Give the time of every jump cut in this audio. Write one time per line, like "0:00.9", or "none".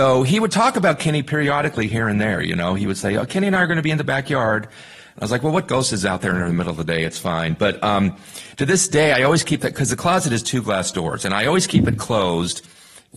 none